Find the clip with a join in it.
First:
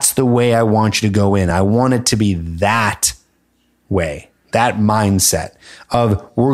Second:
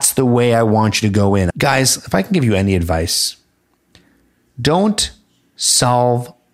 second; 1 cut; at 1.5 s

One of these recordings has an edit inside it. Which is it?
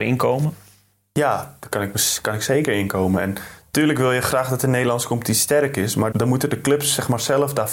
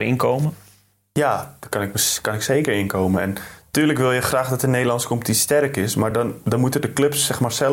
first; 1 cut; at 6.1 s

